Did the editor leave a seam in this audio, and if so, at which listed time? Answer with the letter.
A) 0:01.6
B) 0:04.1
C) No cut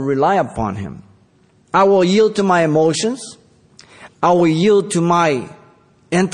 B